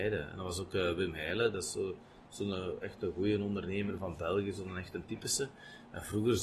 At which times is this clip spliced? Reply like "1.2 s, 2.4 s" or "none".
none